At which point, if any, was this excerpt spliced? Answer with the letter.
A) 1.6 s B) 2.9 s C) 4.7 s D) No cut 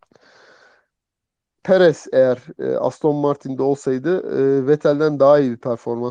A